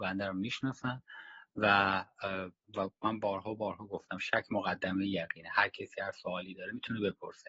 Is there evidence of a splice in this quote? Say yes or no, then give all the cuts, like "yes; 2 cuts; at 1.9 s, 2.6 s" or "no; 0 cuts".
yes; 1 cut; at 2.6 s